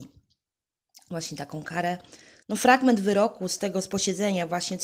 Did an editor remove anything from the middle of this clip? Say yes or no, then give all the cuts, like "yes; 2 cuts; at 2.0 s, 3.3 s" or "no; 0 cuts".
yes; 1 cut; at 2.4 s